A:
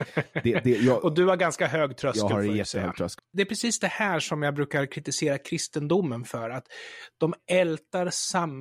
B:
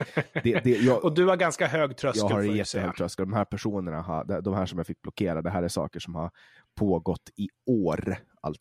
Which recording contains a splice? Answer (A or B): A